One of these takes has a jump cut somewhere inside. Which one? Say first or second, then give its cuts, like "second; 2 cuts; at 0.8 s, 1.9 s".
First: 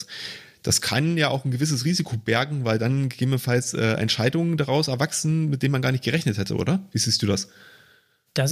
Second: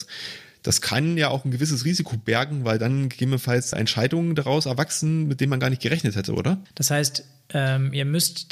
second; 2 cuts; at 3.7 s, 6.7 s